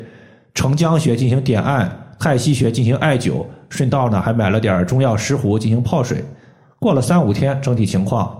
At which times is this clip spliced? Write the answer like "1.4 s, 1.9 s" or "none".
none